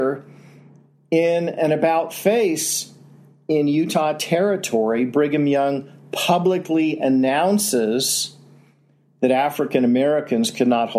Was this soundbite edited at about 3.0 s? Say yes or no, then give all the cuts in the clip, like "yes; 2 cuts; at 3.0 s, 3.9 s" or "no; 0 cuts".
no; 0 cuts